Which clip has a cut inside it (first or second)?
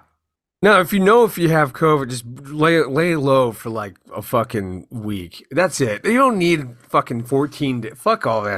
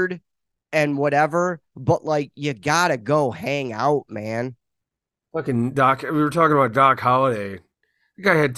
second